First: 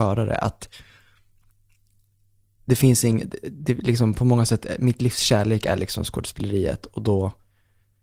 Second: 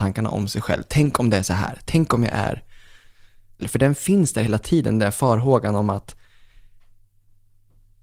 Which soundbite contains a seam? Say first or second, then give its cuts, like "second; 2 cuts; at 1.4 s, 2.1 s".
second; 1 cut; at 3.6 s